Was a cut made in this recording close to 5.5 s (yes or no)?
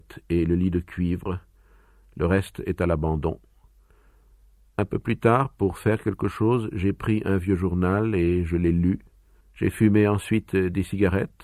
no